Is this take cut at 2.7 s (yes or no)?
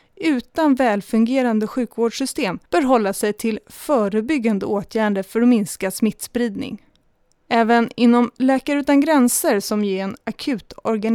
yes